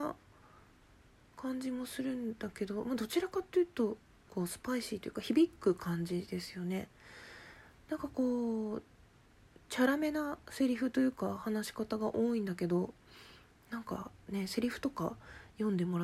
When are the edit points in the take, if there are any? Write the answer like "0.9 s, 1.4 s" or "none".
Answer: 4.3 s, 10.4 s